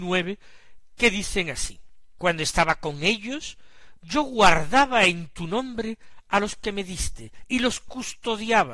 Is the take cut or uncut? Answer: cut